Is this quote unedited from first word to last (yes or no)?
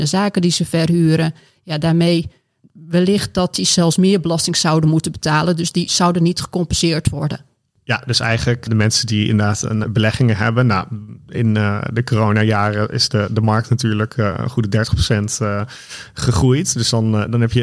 no